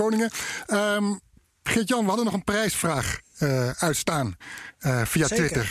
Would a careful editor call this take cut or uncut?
uncut